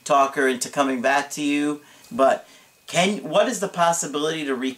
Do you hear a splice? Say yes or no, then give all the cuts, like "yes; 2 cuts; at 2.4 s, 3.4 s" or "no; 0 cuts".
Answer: yes; 1 cut; at 2.0 s